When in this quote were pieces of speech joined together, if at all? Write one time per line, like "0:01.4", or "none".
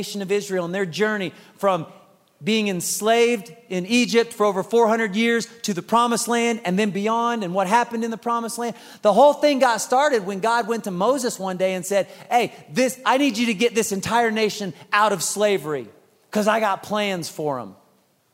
none